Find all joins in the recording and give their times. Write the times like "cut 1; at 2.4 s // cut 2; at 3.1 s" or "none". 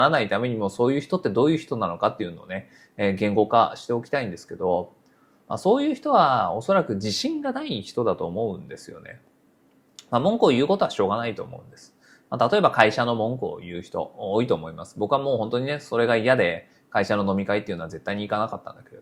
none